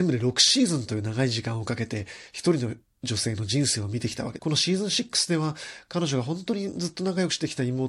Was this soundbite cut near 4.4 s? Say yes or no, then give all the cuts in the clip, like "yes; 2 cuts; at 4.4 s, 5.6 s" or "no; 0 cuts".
yes; 1 cut; at 4.4 s